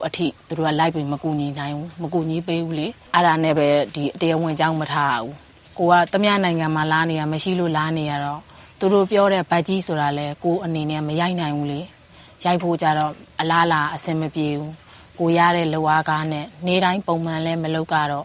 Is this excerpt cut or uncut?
uncut